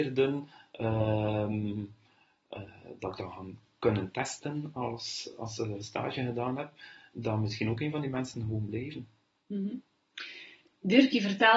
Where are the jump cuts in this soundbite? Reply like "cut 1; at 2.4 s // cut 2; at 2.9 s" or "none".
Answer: none